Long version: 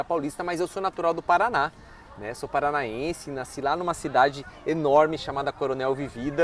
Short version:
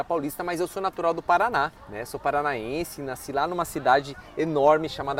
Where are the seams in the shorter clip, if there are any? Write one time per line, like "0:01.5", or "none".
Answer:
0:01.8